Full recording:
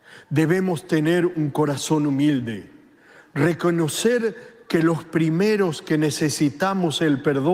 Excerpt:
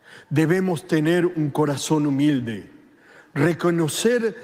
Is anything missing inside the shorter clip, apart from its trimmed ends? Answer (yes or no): no